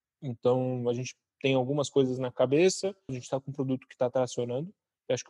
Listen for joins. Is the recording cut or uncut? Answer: cut